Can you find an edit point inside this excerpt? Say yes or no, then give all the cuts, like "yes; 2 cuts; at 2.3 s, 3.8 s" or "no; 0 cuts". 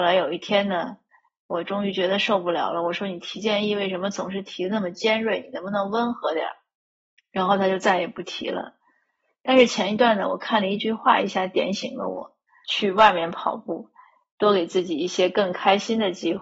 yes; 1 cut; at 12.6 s